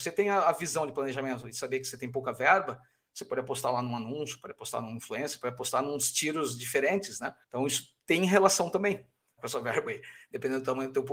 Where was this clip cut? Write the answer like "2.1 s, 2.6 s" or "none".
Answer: 7.4 s, 9.4 s

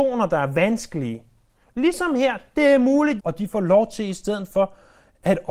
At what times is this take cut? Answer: 3.2 s

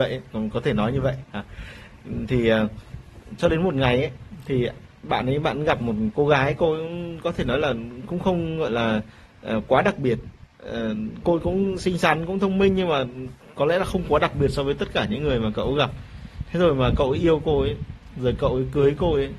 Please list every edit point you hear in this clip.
11.2 s

